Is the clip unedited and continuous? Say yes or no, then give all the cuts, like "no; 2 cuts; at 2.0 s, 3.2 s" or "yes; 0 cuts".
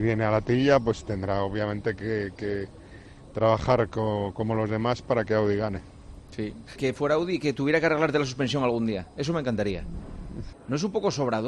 no; 3 cuts; at 3.3 s, 6.8 s, 10.5 s